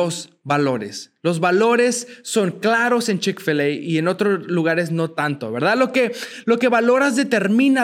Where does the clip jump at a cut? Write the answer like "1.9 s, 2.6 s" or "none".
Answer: none